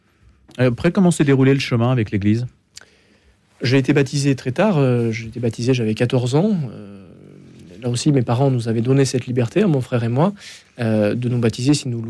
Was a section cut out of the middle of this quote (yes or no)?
no